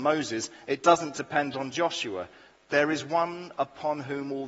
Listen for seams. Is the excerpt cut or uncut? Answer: uncut